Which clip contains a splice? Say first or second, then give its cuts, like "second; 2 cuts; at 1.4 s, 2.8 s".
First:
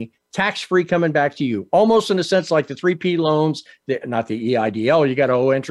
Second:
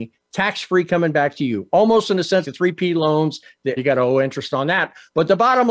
second; 2 cuts; at 2.4 s, 3.8 s